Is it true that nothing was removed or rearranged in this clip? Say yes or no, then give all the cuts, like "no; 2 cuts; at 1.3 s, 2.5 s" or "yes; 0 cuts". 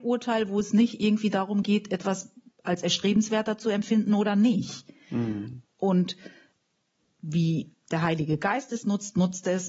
yes; 0 cuts